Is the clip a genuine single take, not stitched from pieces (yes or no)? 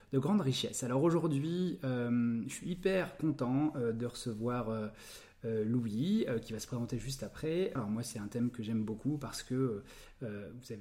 no